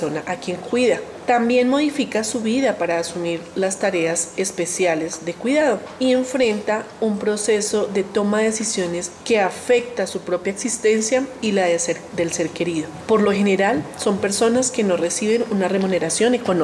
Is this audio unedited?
yes; 0 cuts

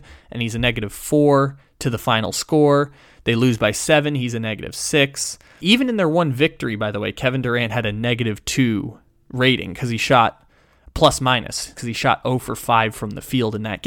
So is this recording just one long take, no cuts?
no; 2 cuts; at 5.6 s, 11.7 s

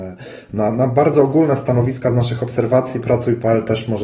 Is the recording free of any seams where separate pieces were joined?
yes; 0 cuts

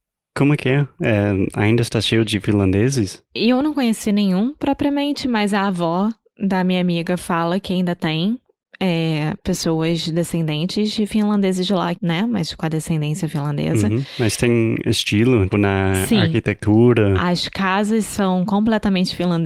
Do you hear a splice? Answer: yes; 2 cuts; at 11.9 s, 15.5 s

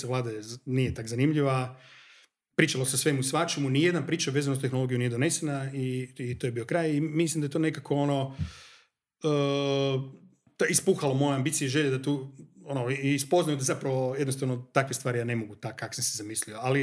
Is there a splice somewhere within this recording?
no; 0 cuts

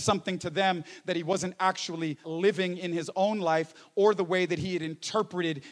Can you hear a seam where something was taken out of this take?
yes; 1 cut; at 2.2 s

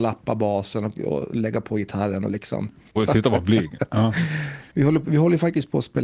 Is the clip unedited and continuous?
no; 2 cuts; at 3.0 s, 4.7 s

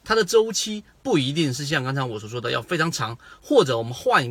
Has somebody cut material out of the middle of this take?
no; 0 cuts

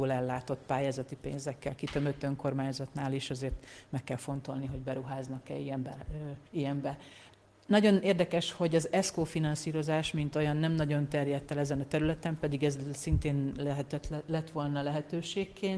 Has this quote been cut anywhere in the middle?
yes; 1 cut; at 6.5 s

